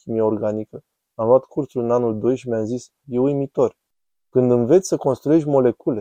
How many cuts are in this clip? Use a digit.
1